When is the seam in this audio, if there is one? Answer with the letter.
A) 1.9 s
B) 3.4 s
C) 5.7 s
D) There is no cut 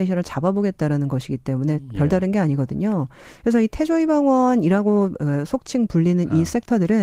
D